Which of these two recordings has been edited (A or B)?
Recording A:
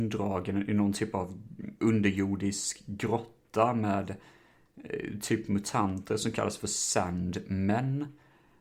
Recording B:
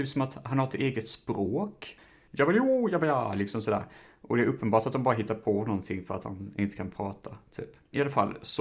B